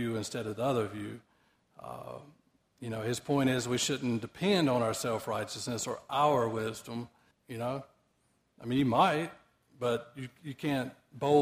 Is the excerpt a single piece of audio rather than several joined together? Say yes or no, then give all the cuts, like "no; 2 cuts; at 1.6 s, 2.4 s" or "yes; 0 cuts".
no; 1 cut; at 7.3 s